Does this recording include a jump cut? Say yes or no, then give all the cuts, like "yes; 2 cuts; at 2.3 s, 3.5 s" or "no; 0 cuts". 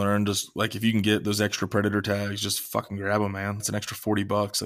yes; 1 cut; at 3.6 s